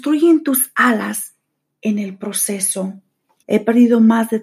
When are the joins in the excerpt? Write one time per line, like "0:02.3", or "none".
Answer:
0:03.4